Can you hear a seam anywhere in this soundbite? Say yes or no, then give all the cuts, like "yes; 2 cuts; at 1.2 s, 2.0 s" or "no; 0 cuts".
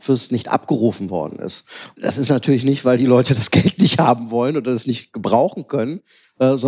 no; 0 cuts